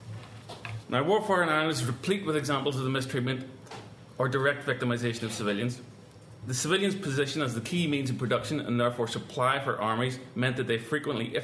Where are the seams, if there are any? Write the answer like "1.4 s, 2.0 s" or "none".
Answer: none